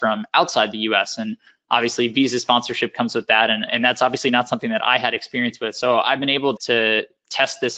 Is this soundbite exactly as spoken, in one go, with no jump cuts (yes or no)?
no